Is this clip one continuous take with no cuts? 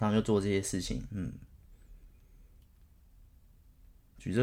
yes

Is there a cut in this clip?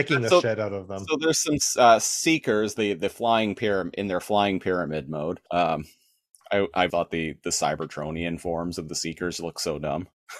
yes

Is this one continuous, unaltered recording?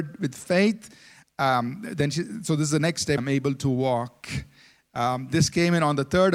no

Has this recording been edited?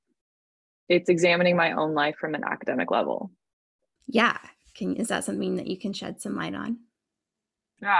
yes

